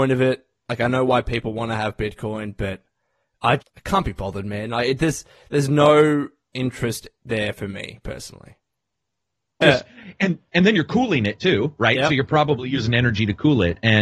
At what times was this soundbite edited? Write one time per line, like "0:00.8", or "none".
0:03.6
0:09.6